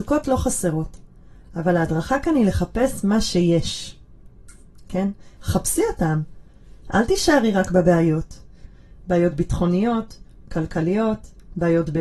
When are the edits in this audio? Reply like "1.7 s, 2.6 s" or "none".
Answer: 5.4 s, 9.0 s